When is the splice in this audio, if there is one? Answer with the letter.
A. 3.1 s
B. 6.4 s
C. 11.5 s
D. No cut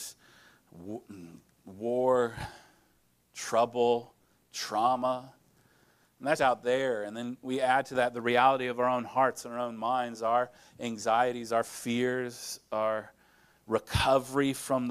B